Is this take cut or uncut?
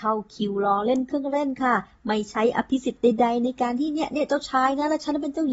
uncut